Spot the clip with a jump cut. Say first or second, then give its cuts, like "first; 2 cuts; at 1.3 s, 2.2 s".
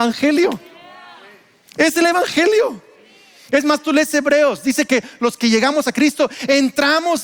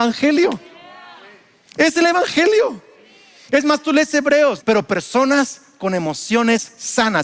second; 1 cut; at 4.6 s